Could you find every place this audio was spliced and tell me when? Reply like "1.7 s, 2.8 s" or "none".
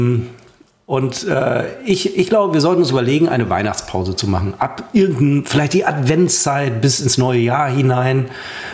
none